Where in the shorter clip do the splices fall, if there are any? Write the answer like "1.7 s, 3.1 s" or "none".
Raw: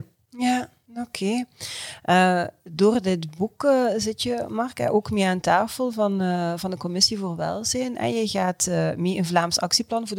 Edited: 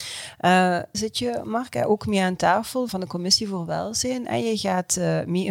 0.9 s, 2.9 s